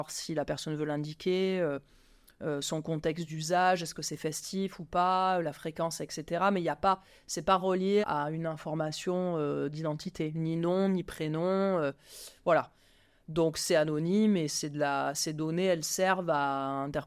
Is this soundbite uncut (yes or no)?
no